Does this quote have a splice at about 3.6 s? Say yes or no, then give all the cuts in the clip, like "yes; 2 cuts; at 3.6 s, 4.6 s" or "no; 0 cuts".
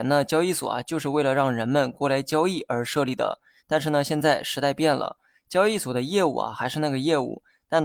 yes; 1 cut; at 3.6 s